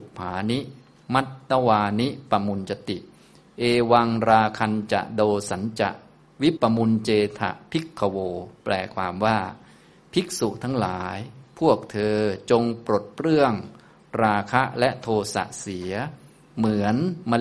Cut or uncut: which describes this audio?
cut